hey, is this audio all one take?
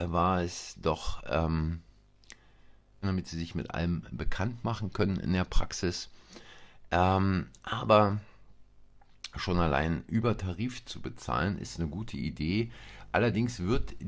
no; 1 cut; at 3.0 s

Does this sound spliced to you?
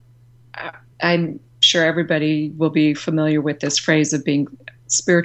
no; 0 cuts

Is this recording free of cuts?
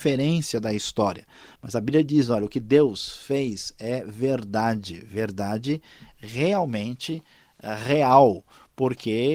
yes; 0 cuts

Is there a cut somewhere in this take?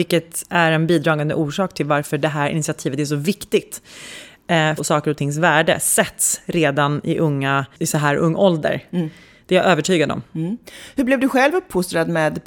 yes; 1 cut; at 4.8 s

